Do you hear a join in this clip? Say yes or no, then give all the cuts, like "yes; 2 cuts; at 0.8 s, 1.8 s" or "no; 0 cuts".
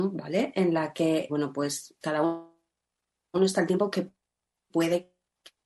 yes; 1 cut; at 1.3 s